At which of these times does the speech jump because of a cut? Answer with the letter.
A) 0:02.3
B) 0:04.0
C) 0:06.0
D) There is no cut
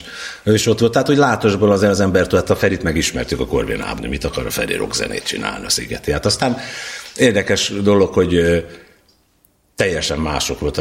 B